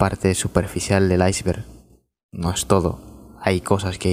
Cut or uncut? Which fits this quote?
uncut